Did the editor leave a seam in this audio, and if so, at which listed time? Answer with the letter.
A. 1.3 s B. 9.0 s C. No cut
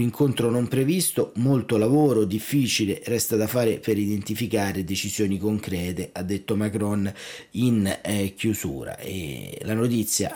C